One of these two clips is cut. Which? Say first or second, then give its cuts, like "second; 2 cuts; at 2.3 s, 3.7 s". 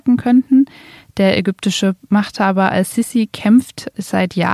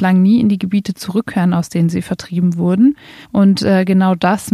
second; 1 cut; at 3.2 s